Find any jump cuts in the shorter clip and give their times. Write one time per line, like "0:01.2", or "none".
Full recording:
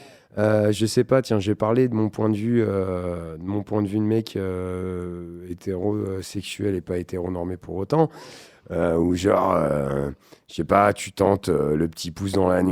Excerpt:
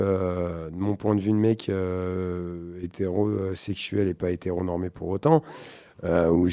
none